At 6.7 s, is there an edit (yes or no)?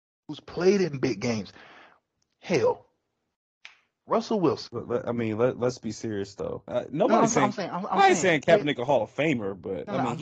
yes